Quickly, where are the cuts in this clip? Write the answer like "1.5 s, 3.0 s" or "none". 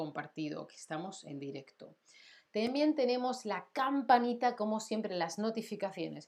none